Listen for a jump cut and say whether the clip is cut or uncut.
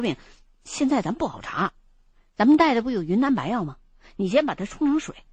uncut